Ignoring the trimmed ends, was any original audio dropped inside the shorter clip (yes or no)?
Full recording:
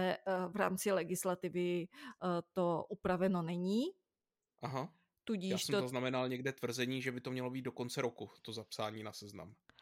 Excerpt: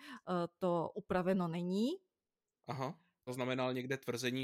yes